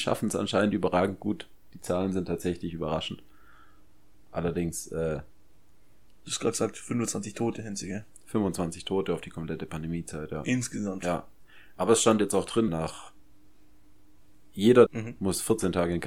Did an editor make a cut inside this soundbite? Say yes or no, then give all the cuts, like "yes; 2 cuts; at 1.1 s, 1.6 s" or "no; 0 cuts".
yes; 2 cuts; at 12.7 s, 14.9 s